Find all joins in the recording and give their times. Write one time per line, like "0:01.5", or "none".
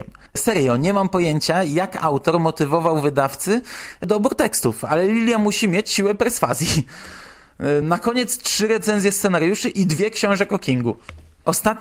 none